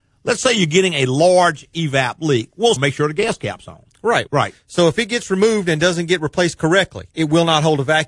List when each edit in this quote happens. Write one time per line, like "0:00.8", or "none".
0:02.8
0:04.3
0:07.1